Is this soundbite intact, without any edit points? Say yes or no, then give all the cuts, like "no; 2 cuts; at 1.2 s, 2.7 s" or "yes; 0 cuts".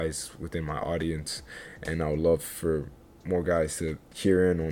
yes; 0 cuts